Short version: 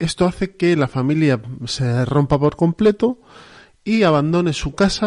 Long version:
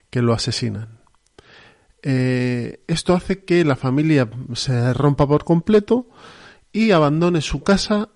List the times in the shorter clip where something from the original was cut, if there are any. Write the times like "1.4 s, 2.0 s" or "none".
none

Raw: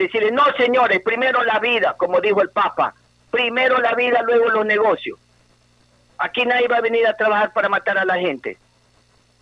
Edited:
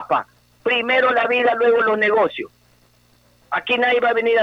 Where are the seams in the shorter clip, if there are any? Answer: none

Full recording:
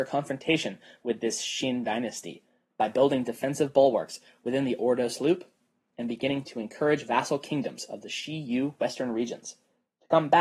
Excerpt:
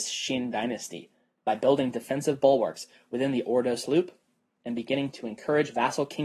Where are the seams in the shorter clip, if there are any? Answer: none

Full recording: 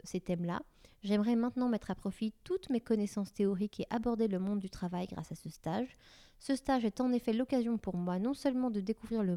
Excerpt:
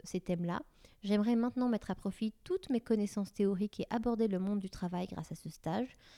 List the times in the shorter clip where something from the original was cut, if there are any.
none

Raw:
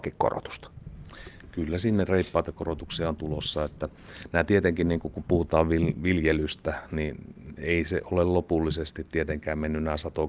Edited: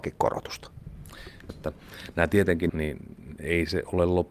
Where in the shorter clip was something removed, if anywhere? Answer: 1.5 s, 2.7 s

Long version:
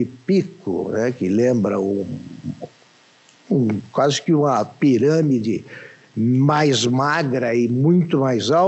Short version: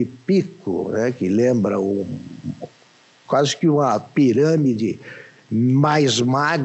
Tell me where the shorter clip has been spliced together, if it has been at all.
3.3 s

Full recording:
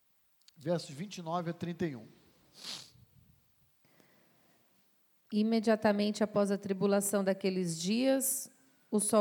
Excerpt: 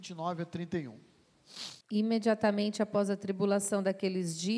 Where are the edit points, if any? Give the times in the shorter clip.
1.8 s

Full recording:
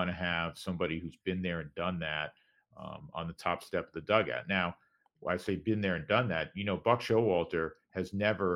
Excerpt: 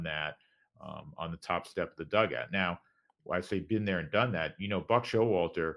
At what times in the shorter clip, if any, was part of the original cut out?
none

